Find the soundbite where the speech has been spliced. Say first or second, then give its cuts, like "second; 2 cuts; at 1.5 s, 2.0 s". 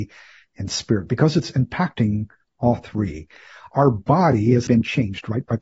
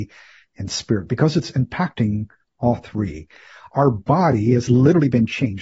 first; 1 cut; at 4.7 s